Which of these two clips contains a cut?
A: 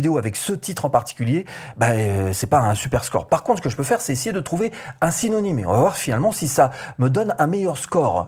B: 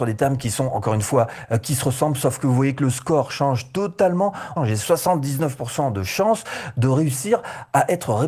B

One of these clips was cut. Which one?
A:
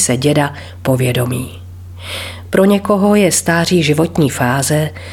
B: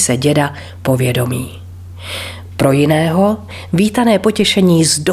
B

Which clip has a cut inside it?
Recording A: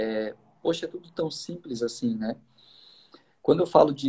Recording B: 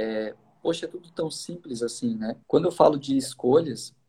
B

